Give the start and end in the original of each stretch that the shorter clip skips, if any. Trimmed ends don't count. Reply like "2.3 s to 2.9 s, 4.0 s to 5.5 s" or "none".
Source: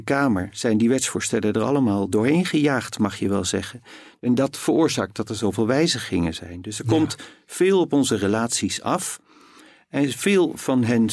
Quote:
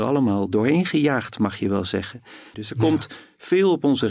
4.1 s to 6.6 s